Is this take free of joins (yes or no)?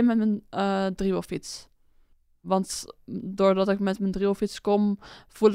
yes